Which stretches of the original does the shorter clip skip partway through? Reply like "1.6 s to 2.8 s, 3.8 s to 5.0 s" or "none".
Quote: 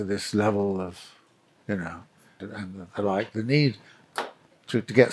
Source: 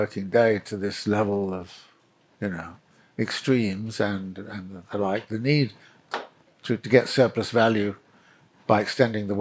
3.1 s to 4.4 s

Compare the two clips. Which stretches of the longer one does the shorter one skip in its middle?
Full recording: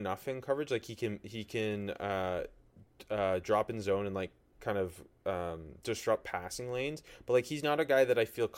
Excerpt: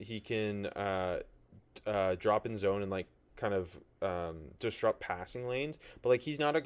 none

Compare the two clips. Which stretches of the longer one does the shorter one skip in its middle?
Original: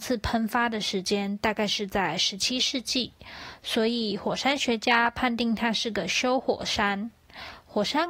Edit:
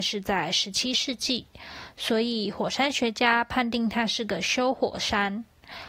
none

